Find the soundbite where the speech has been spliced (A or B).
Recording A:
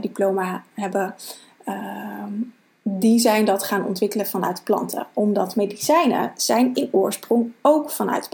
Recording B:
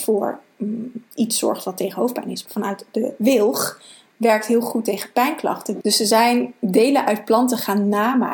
B